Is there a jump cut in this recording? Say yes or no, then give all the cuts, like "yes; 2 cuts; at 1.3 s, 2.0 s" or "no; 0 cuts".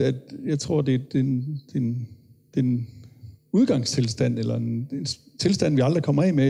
no; 0 cuts